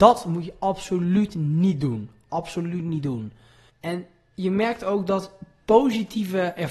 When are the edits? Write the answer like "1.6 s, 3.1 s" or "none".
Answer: 3.7 s